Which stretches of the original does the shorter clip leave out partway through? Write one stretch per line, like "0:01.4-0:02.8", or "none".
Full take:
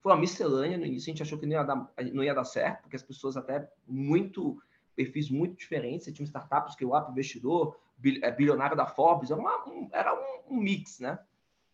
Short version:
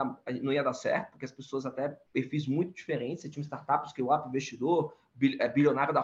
0:03.8-0:04.9